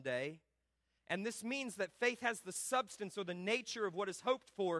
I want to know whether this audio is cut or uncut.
cut